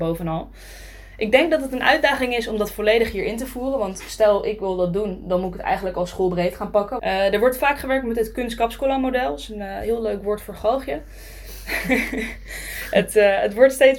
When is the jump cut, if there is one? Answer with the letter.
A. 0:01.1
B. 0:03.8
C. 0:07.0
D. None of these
C